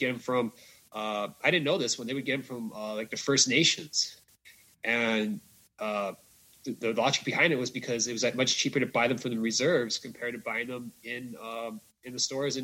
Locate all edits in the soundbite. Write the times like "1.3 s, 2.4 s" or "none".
none

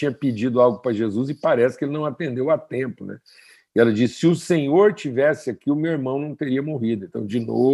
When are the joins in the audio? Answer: none

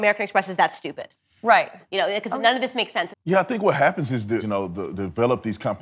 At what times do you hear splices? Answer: 1.8 s, 3.1 s, 4.4 s

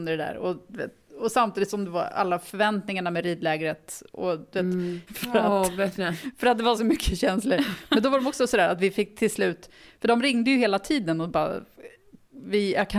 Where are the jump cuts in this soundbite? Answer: 5.1 s

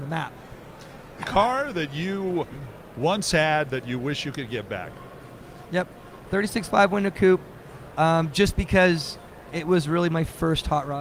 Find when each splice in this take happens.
5.7 s

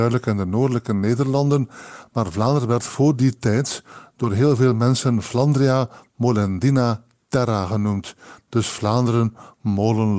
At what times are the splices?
none

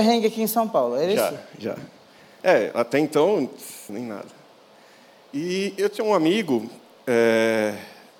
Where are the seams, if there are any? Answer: 3.9 s

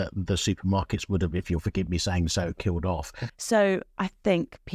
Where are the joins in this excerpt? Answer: 3.3 s

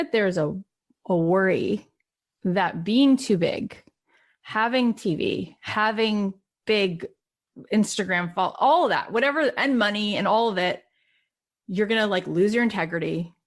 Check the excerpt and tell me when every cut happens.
none

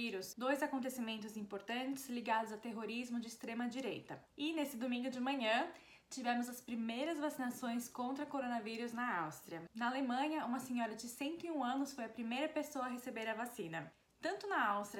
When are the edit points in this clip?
4.3 s, 9.7 s

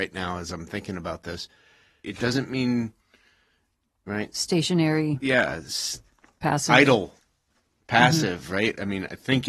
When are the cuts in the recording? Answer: 2.0 s

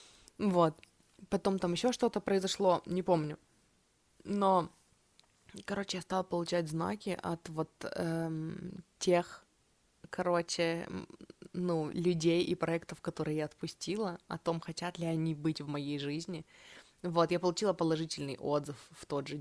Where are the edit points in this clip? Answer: none

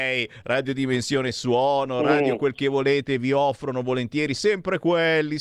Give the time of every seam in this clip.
none

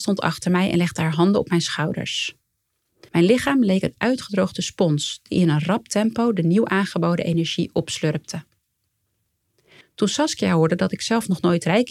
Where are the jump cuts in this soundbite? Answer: 3.1 s, 9.8 s

